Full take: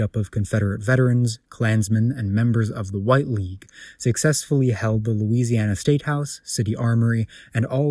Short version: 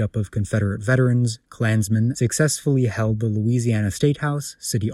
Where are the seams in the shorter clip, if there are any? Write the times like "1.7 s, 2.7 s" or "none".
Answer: 2.1 s